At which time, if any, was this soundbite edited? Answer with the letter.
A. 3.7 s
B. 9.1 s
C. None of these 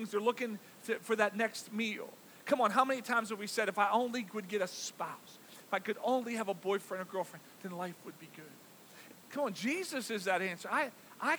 B